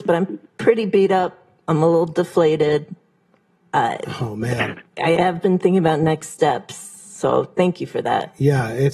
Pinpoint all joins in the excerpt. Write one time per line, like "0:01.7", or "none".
none